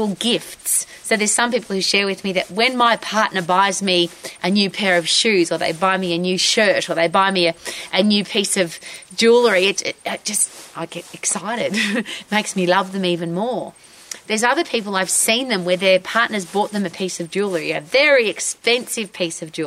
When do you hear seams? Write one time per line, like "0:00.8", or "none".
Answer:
0:09.8